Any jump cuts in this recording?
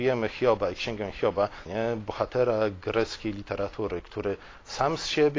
yes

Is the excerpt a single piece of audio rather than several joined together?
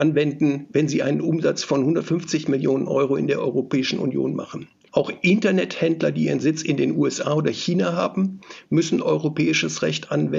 no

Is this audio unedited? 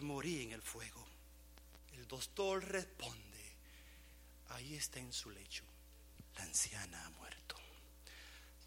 no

